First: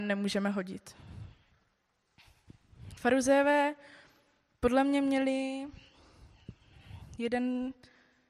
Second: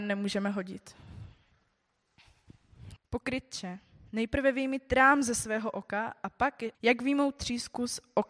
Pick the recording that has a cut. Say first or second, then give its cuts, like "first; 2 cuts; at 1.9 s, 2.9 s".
second; 2 cuts; at 3.0 s, 6.7 s